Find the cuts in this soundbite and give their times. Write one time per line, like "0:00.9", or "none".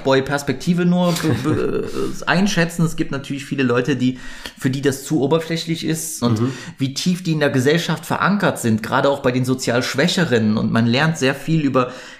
0:06.2

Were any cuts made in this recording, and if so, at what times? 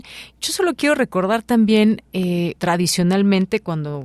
0:02.6

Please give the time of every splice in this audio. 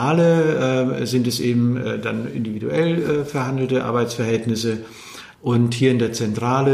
0:05.3

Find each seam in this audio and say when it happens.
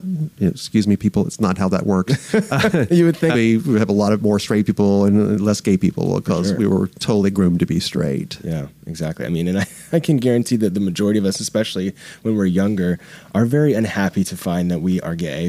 0:03.3

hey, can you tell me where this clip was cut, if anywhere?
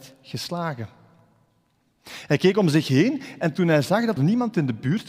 0:04.2

